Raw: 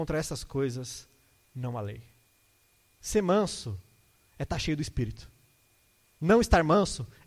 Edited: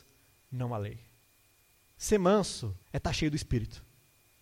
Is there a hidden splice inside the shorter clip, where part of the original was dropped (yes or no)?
yes